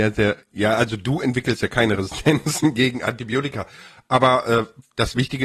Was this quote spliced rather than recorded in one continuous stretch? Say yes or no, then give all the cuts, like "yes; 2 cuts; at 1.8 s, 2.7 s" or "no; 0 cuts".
no; 0 cuts